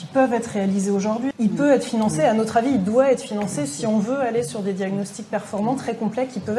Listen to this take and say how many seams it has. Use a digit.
1